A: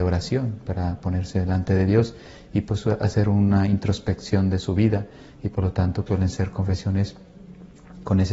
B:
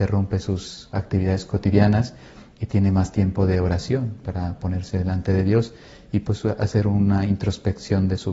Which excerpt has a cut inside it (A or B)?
A